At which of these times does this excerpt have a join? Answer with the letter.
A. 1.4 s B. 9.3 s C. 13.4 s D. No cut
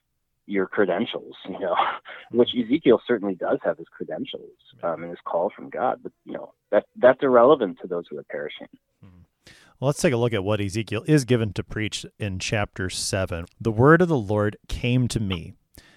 C